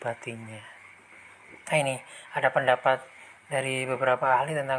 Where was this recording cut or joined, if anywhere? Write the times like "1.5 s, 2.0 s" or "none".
1.7 s